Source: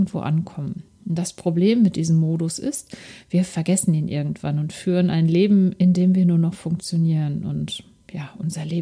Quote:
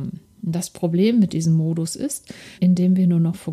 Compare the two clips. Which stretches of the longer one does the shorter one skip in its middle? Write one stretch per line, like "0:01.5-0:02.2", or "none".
0:03.2-0:05.7